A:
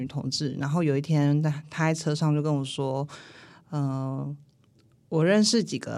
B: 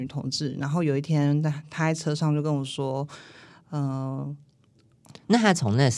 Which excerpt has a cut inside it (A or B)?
B